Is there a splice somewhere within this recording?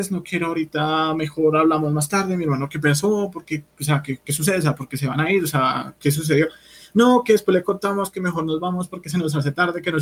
no; 0 cuts

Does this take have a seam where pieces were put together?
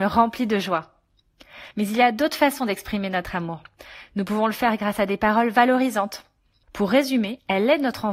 yes; 2 cuts; at 1.7 s, 6.6 s

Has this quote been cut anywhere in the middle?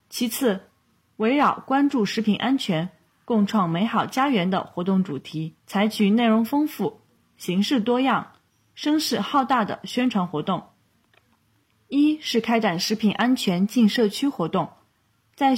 yes; 1 cut; at 5.6 s

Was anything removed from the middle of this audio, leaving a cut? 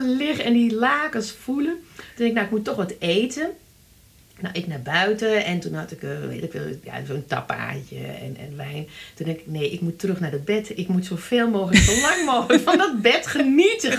no; 0 cuts

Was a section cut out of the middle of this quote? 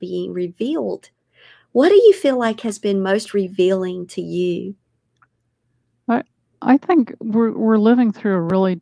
no; 0 cuts

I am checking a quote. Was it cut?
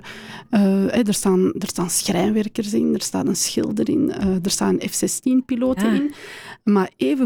no; 0 cuts

